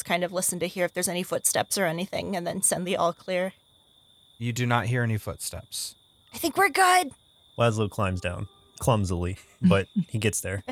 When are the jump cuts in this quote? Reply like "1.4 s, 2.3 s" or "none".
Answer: 6.2 s

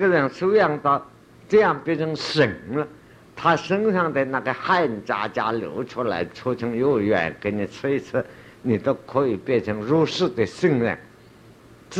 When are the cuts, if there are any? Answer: none

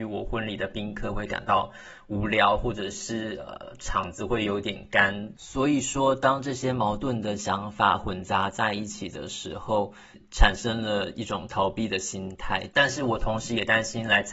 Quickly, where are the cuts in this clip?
5.3 s, 12.7 s

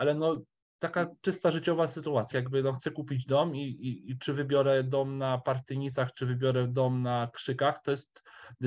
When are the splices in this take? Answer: 2.3 s

